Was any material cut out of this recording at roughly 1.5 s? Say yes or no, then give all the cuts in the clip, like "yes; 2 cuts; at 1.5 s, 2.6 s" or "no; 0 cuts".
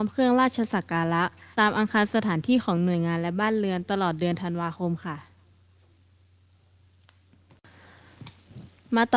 yes; 1 cut; at 1.5 s